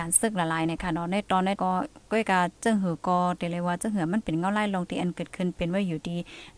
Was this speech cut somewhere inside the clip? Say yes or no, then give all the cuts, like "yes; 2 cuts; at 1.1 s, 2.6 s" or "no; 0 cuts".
yes; 1 cut; at 1.6 s